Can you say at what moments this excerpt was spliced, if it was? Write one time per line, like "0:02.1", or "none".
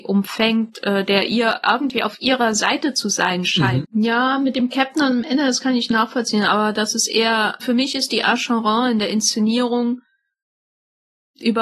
0:03.8
0:07.6